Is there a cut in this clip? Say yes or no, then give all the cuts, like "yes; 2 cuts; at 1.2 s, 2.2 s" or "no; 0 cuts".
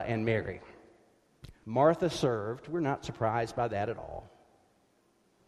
yes; 1 cut; at 1.6 s